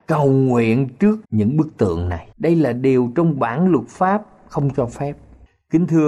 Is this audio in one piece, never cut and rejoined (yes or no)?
no